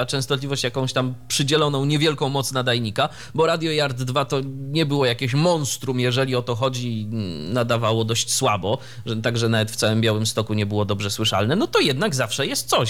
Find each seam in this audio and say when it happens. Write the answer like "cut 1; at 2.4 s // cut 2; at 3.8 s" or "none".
none